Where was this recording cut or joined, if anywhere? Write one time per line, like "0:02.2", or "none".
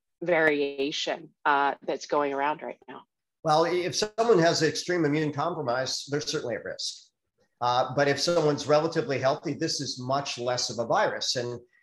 none